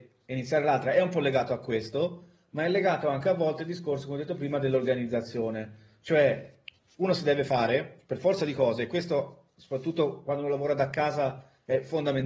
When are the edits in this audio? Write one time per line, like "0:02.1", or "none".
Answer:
none

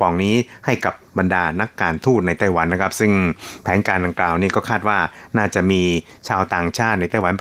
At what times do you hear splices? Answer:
none

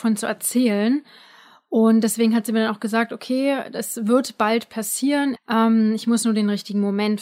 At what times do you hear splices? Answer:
0:05.4

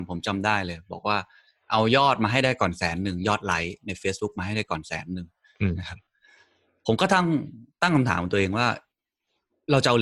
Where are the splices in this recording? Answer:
none

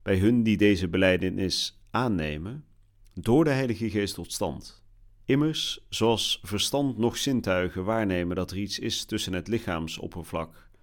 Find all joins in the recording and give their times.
0:05.2

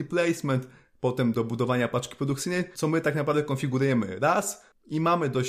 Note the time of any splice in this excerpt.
0:01.3
0:02.7

